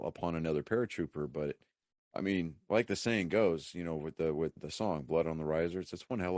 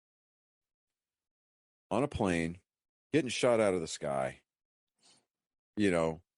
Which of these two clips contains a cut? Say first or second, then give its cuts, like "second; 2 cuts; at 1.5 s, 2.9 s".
first; 1 cut; at 4.6 s